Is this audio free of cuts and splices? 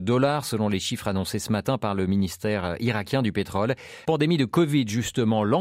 no; 1 cut; at 4.0 s

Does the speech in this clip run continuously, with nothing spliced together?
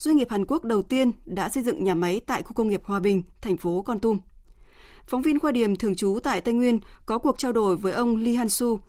yes; 0 cuts

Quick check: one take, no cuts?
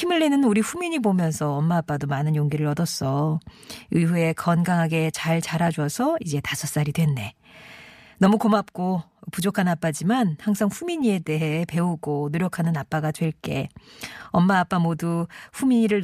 yes; 0 cuts

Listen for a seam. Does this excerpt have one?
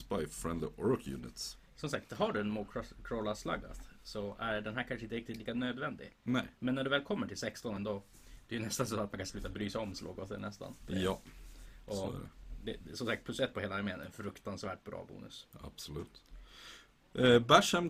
yes; 1 cut; at 7.8 s

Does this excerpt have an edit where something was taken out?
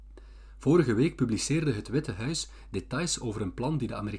no; 0 cuts

